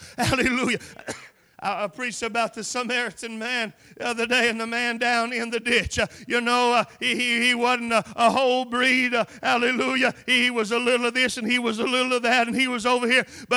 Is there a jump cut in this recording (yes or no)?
no